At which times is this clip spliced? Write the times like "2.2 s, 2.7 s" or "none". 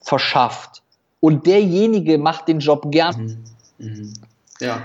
3.1 s